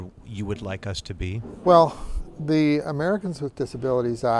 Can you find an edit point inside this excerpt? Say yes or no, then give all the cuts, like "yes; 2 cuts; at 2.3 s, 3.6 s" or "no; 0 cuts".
no; 0 cuts